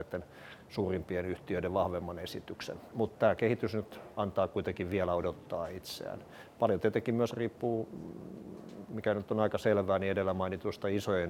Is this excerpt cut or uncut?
uncut